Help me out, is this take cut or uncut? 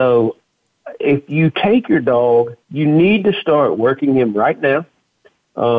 cut